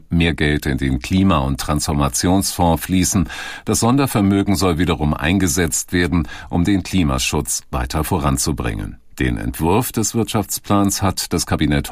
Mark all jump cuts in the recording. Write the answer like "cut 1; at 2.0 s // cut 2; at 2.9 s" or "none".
none